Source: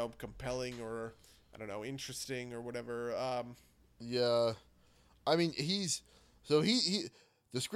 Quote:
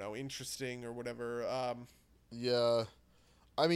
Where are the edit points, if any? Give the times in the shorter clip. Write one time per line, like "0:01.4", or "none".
none